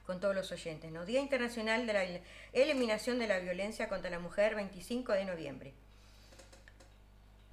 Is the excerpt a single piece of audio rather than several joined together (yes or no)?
yes